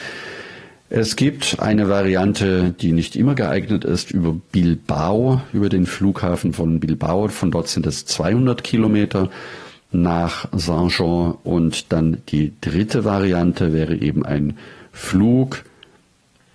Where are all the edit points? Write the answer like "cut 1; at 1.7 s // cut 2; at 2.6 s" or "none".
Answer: none